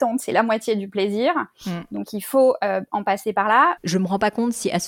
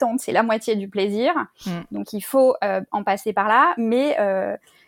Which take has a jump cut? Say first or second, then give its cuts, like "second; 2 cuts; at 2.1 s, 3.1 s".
first; 1 cut; at 3.8 s